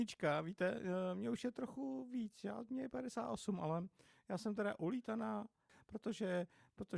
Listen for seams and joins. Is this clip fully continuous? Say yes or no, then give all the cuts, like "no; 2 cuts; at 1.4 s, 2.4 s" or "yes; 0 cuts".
yes; 0 cuts